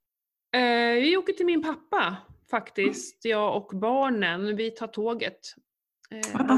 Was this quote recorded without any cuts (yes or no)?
yes